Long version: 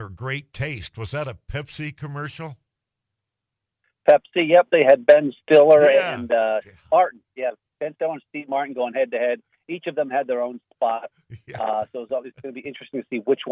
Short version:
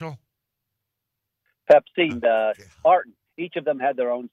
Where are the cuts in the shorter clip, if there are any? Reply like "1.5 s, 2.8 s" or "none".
2.1 s, 3.3 s